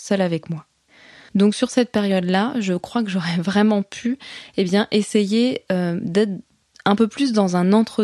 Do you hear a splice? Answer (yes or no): yes